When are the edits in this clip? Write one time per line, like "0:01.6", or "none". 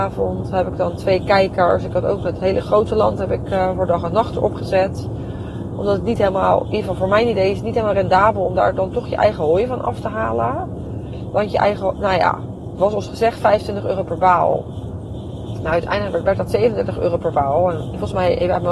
none